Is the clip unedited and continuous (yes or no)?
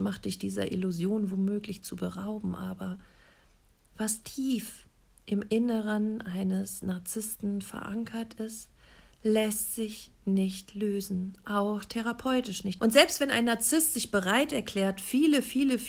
no